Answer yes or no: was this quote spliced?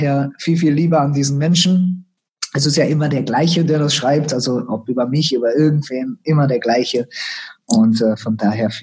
yes